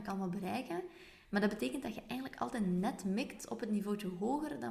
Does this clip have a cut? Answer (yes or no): yes